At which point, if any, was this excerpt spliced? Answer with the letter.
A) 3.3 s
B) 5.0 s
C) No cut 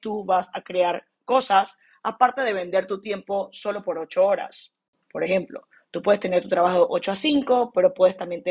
B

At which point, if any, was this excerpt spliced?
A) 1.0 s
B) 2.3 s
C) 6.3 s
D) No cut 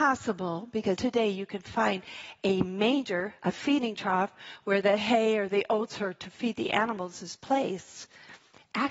A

